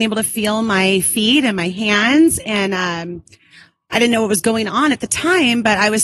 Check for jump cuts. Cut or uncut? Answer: uncut